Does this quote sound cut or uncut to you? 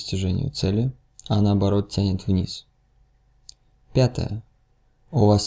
uncut